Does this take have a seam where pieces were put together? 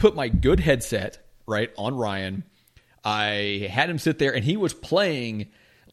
no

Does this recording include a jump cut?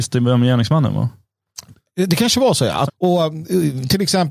yes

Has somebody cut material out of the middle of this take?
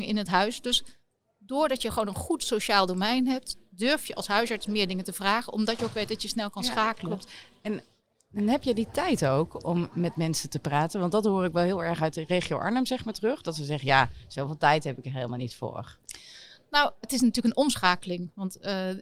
no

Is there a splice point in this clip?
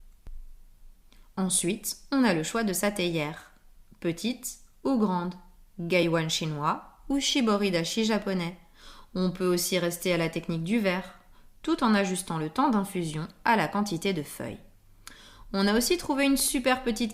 no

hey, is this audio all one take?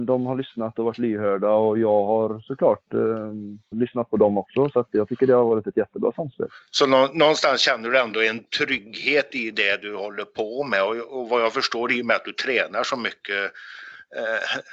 no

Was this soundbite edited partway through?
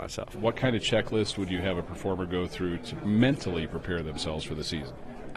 no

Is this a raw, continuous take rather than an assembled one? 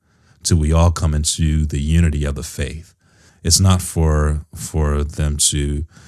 no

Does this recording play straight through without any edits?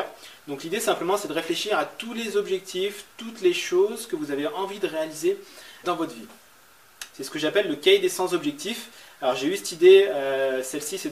no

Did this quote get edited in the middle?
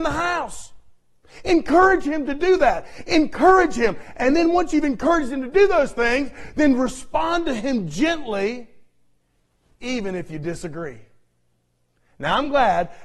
no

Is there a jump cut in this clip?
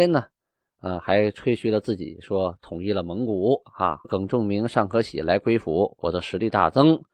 yes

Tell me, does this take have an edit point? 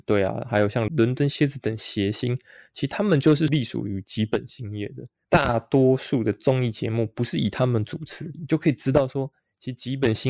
yes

